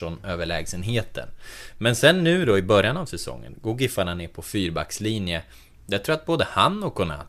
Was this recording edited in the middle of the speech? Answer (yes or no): no